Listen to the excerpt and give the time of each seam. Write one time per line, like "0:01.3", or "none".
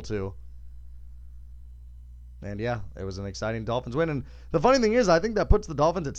none